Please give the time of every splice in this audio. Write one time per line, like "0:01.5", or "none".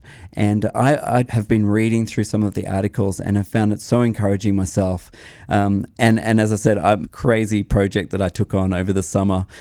0:01.2
0:07.0